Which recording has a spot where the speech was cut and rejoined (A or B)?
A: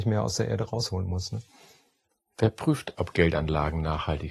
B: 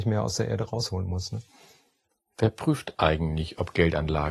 A